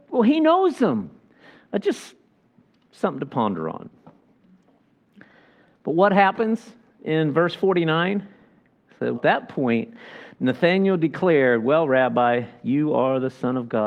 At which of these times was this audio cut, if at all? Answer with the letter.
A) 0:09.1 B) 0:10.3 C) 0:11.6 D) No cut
A